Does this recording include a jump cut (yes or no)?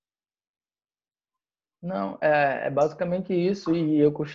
no